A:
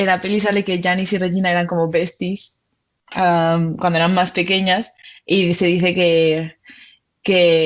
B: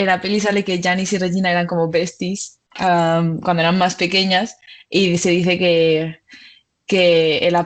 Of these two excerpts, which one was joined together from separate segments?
B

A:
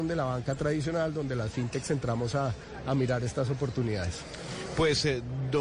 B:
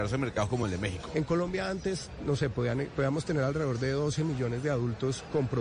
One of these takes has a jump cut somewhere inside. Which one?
B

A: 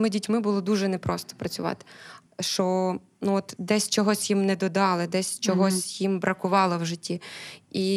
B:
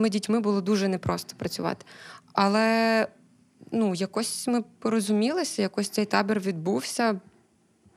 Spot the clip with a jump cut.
A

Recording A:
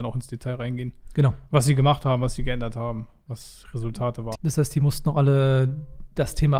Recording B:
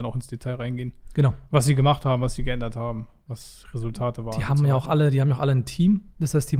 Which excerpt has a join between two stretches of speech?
A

